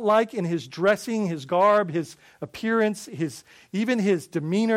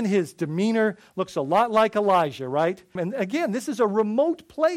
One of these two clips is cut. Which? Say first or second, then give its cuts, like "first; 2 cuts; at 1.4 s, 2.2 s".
second; 1 cut; at 3.0 s